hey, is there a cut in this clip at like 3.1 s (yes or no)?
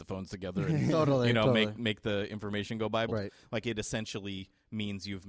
yes